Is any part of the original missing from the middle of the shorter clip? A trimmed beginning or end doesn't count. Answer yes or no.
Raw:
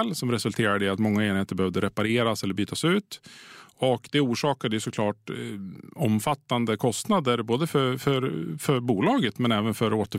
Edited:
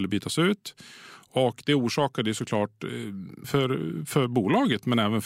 yes